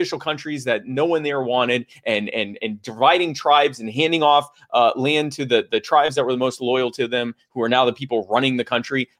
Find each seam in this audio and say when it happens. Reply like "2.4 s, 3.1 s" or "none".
none